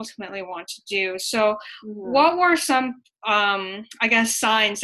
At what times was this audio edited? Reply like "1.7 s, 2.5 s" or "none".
none